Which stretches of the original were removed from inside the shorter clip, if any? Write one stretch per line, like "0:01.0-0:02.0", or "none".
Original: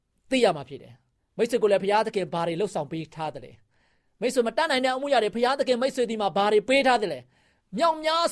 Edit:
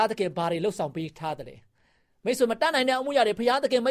none